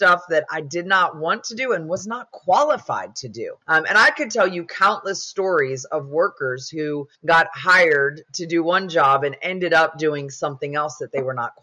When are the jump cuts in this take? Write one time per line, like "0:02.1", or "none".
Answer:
0:03.6
0:07.2

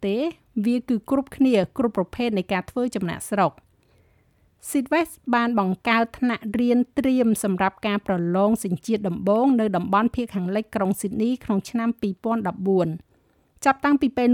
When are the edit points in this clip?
none

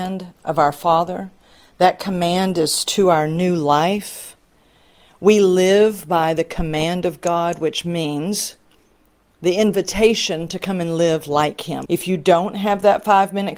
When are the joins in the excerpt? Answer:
0:11.9

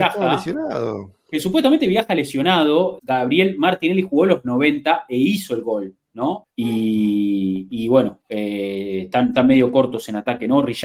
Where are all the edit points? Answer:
0:03.0
0:06.4

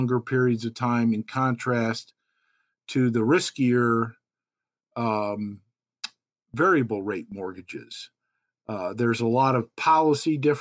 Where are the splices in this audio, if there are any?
none

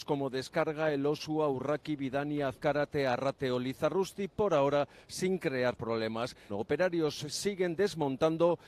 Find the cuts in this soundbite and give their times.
0:06.5

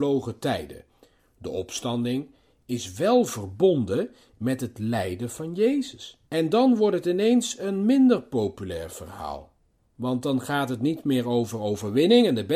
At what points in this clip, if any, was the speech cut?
0:06.3

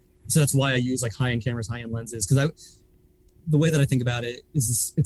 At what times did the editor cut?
none

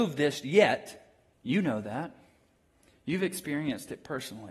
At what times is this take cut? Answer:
0:01.3

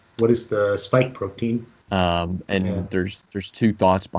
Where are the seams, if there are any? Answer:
0:01.8

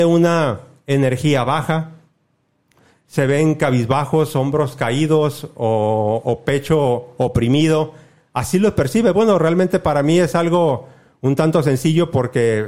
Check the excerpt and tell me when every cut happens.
none

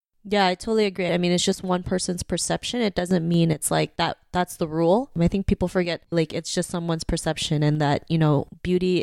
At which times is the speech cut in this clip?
0:01.1
0:06.1

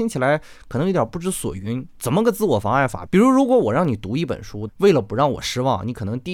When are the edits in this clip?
0:03.1
0:04.7

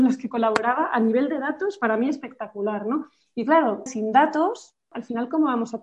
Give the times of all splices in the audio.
0:03.9

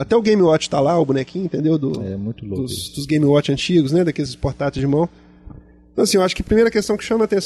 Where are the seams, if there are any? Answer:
0:06.4

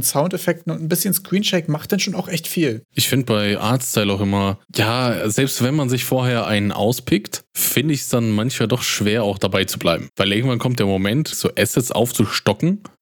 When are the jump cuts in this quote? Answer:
0:11.3

